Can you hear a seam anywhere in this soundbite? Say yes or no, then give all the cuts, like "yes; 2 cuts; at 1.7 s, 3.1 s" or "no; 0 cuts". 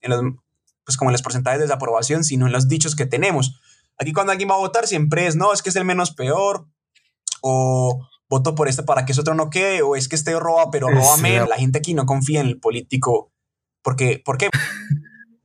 yes; 2 cuts; at 11.5 s, 14.5 s